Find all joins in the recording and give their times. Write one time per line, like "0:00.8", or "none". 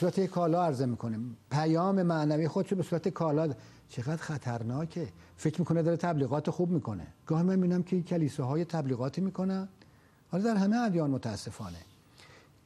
0:07.2